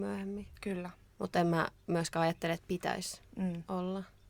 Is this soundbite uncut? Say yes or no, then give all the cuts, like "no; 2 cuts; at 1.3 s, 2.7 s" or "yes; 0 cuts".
no; 1 cut; at 1.1 s